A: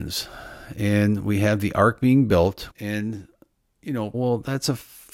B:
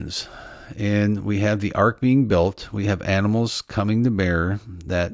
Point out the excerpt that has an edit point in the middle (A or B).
A